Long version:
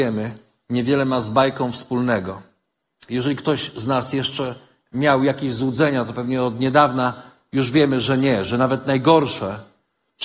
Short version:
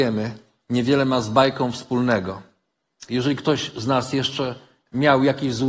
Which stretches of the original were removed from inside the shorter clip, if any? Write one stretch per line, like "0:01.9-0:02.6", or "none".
none